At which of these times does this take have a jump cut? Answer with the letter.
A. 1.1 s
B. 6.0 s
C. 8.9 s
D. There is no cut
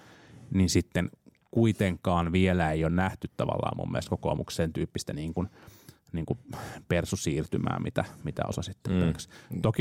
D